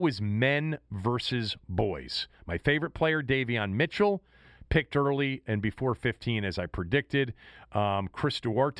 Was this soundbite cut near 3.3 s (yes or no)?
no